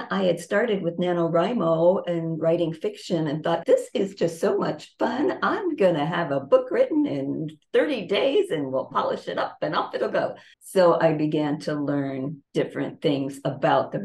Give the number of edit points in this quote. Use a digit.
3